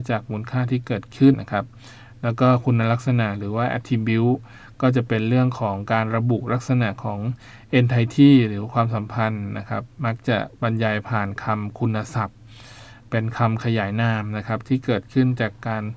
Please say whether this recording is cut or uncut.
cut